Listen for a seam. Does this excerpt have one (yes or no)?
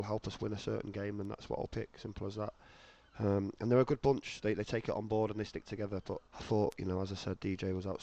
yes